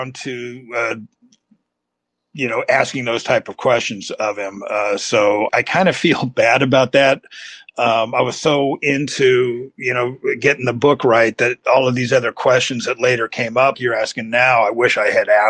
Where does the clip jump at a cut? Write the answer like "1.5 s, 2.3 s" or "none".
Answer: 5.5 s, 13.7 s

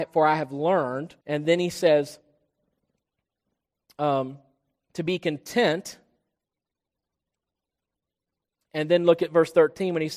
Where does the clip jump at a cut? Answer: 1.2 s

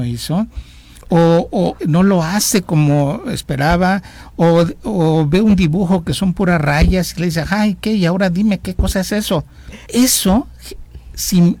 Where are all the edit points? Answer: 1.8 s, 9.9 s

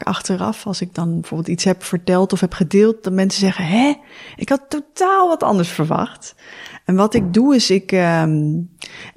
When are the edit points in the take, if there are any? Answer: none

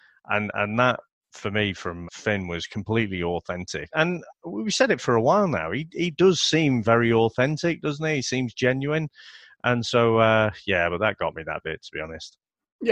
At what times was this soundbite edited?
2.0 s, 3.9 s

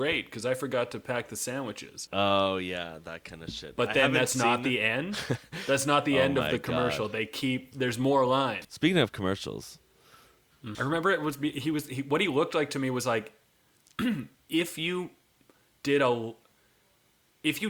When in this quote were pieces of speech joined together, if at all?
2.1 s, 8.6 s, 10.7 s

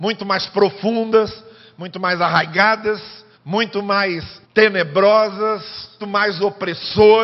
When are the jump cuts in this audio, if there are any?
3.3 s, 4.4 s, 6.0 s

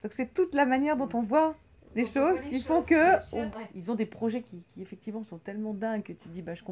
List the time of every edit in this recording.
3.5 s

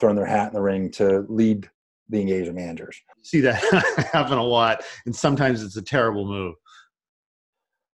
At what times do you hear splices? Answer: 3.1 s

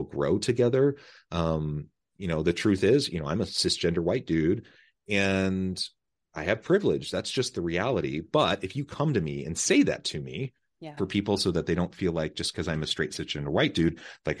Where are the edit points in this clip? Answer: 11.0 s

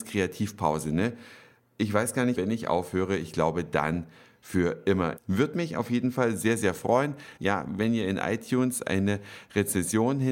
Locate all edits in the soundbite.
2.3 s, 5.2 s, 7.4 s

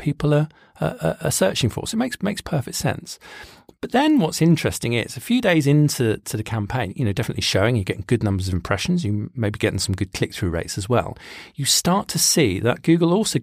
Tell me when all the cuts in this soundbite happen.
6.9 s

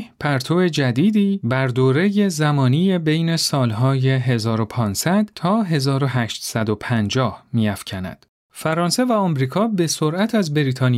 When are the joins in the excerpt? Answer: 8.5 s

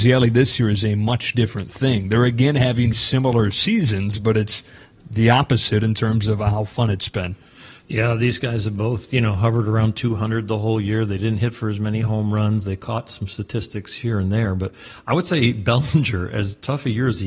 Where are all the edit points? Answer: 2.9 s

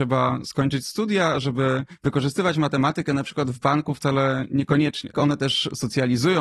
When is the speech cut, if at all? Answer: 5.1 s

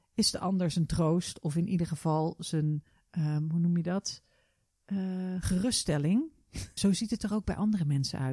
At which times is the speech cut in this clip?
6.8 s

